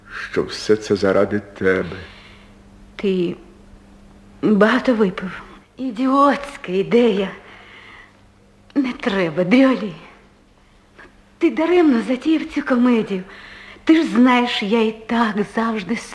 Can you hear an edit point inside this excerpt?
yes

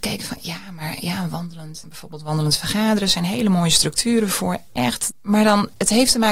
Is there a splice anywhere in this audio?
yes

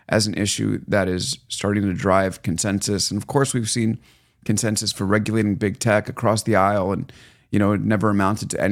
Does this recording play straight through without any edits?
yes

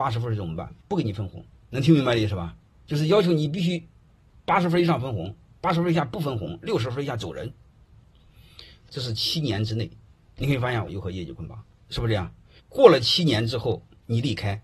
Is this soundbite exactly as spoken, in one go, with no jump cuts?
no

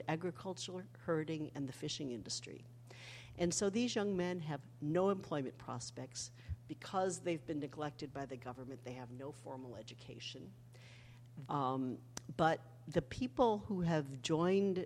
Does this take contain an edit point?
yes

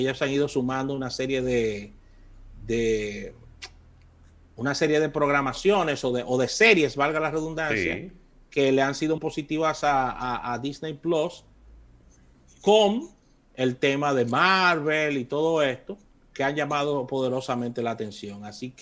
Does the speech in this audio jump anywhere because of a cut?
yes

